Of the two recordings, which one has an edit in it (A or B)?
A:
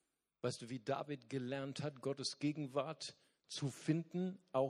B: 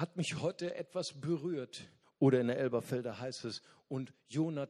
B